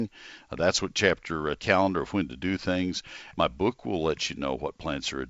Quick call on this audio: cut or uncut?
cut